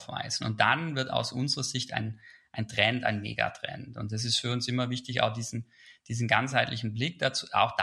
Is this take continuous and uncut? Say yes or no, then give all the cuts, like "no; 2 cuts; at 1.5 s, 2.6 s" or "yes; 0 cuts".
yes; 0 cuts